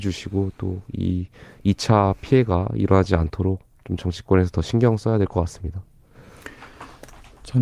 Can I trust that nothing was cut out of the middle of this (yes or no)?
yes